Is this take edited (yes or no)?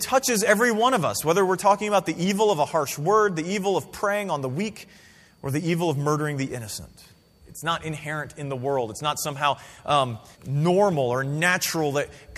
yes